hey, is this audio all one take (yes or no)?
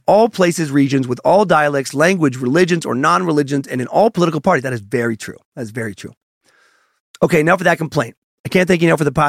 yes